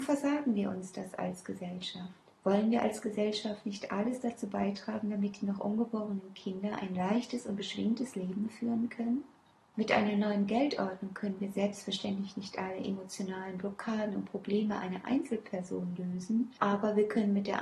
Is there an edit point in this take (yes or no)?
no